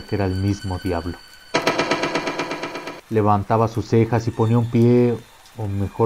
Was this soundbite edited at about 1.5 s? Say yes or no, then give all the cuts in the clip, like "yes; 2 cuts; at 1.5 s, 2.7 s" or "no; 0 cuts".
no; 1 cut; at 3.0 s